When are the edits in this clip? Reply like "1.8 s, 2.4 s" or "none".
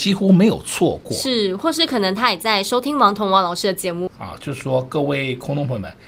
4.1 s